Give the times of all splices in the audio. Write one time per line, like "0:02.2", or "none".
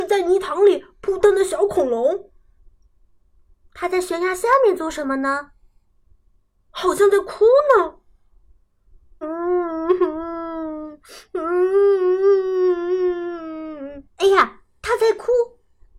0:09.2
0:14.1